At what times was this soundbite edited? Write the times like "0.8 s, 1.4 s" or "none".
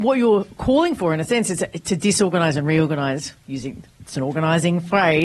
none

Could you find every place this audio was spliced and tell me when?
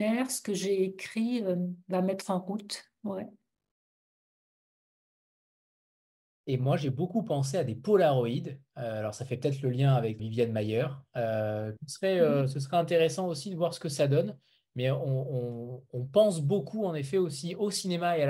10.2 s, 11.8 s

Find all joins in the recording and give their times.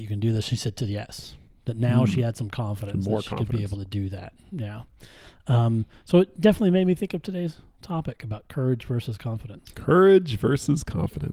none

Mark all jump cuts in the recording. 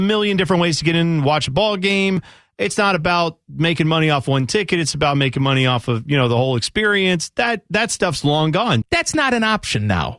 8.8 s

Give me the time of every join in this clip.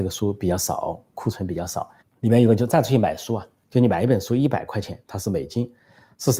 2.0 s

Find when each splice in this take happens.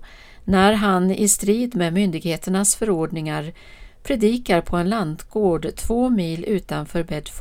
none

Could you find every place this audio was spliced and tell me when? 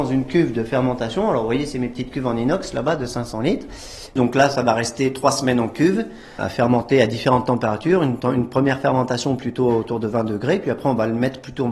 6.4 s

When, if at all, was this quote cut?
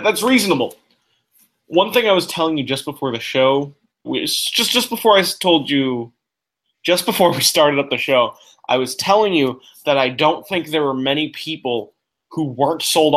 4.0 s

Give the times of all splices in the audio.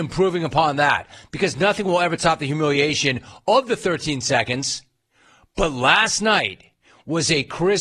none

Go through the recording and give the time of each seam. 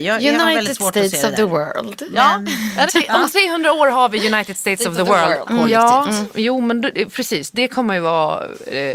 2.9 s, 5.5 s

